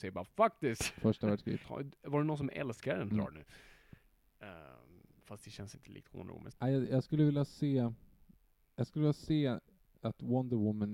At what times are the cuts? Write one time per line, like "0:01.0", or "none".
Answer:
0:01.6
0:03.1
0:06.5